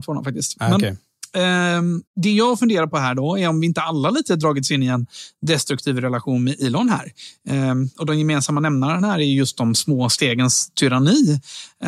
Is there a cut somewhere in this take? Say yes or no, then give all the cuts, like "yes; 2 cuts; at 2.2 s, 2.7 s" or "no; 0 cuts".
yes; 1 cut; at 2.1 s